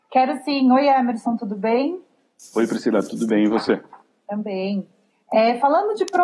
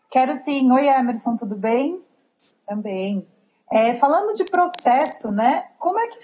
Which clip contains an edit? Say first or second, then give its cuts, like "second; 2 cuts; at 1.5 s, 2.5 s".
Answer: second; 1 cut; at 2.5 s